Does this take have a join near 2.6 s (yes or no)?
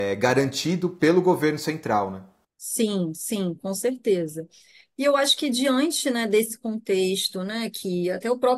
no